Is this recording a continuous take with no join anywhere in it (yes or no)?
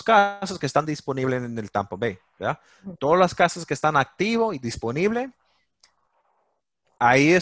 yes